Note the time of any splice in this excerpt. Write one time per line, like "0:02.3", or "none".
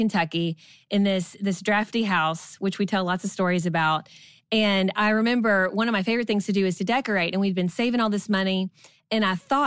none